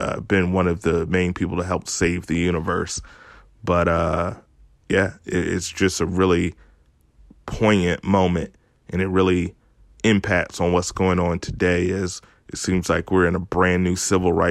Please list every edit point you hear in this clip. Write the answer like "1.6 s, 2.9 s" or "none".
none